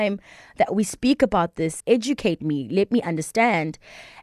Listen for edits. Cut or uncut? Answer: cut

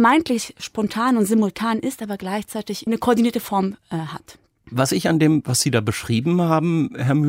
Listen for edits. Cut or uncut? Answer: uncut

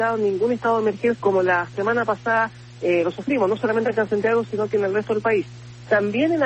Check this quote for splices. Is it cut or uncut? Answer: cut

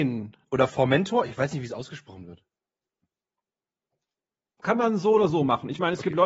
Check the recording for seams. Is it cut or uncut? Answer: uncut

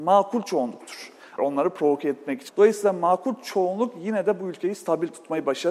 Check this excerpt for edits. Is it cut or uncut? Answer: cut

